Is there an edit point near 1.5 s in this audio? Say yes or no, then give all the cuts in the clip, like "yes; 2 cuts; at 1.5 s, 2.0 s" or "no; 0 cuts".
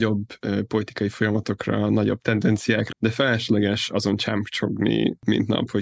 no; 1 cut; at 2.9 s